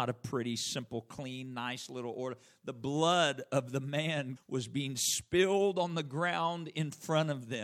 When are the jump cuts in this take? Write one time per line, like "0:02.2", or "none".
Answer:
0:04.4

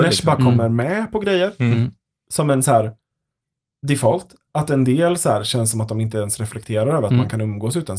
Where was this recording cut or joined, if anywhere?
none

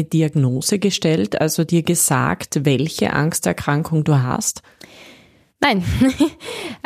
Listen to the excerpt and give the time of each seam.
none

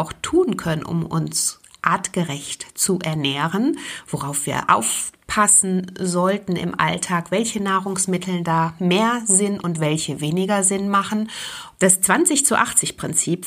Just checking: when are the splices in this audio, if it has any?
0:11.7

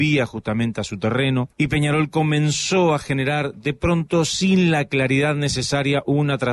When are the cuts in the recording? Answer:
0:01.5

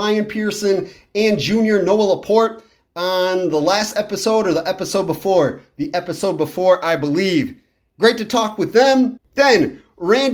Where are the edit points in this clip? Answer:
0:09.2

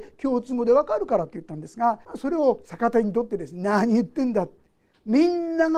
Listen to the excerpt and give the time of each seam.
0:02.0

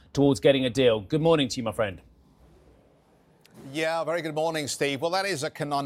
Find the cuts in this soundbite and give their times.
none

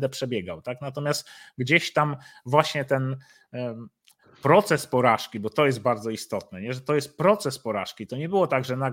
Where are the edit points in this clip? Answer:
none

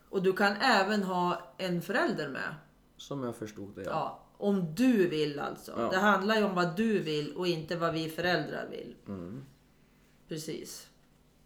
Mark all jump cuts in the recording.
none

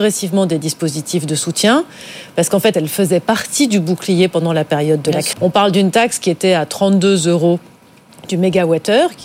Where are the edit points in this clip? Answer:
0:02.7
0:05.3

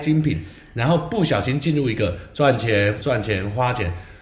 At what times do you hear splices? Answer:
0:03.0

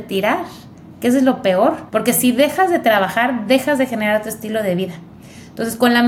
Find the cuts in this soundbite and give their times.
0:01.9

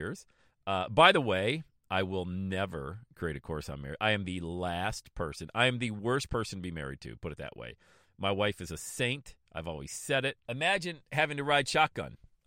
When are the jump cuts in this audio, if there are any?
0:10.5

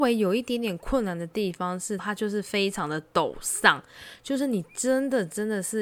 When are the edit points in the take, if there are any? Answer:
0:02.0

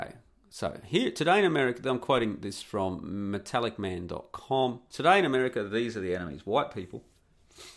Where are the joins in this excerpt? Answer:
0:04.9

